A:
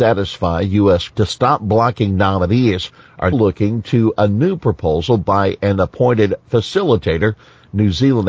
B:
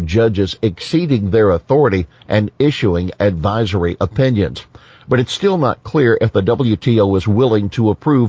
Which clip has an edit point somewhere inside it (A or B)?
A